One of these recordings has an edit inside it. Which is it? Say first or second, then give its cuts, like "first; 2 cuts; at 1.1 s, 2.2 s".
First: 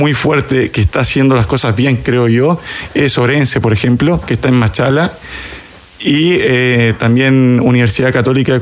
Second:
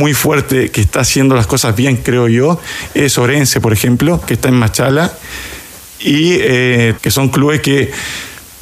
second; 1 cut; at 7.0 s